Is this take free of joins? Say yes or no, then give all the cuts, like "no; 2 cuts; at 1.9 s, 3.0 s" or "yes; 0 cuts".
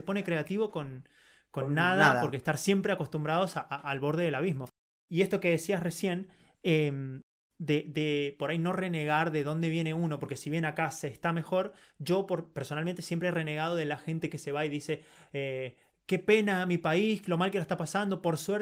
yes; 0 cuts